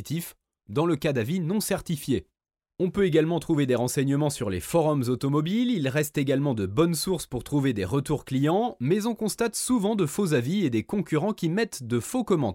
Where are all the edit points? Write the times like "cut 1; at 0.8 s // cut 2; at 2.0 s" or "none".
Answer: none